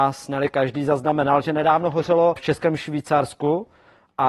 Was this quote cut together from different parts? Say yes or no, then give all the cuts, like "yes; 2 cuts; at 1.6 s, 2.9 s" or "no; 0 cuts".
yes; 1 cut; at 2.4 s